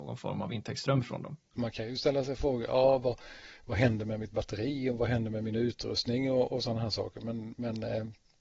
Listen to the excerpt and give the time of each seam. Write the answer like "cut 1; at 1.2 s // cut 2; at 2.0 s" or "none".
cut 1; at 1.5 s